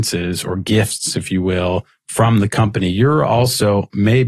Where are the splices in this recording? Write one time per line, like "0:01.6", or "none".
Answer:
none